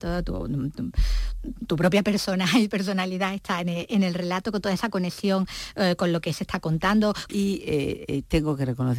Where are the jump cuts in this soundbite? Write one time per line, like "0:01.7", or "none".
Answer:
0:07.3